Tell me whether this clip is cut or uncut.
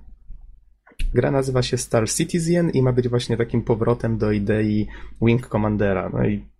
cut